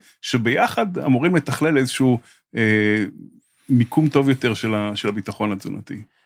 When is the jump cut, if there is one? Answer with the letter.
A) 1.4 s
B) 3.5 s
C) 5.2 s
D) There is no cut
D